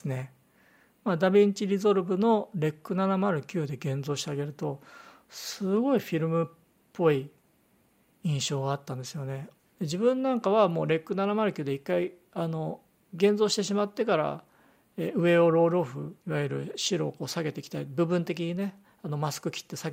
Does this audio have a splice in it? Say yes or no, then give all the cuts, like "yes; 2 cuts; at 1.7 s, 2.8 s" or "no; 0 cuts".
yes; 2 cuts; at 9.7 s, 16.2 s